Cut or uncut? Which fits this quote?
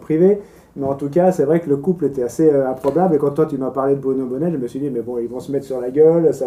uncut